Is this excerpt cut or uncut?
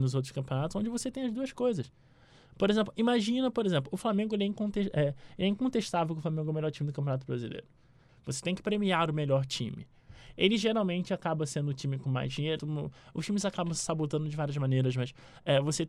cut